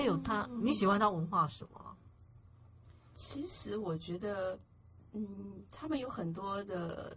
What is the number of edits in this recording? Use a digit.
0